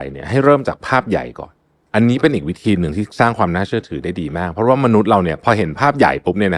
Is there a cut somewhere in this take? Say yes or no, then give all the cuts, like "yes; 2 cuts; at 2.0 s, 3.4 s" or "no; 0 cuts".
no; 0 cuts